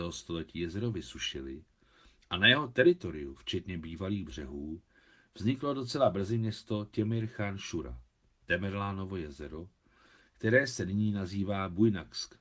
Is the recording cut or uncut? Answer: uncut